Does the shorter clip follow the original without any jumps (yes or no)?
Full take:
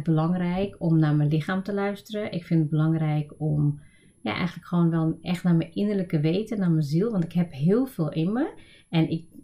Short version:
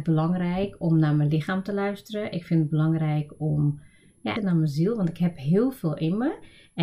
no